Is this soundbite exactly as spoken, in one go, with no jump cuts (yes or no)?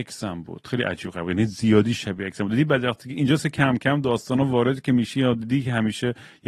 yes